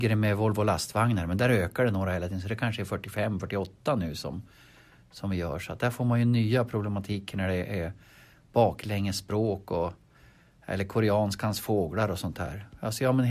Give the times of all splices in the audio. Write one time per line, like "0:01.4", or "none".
none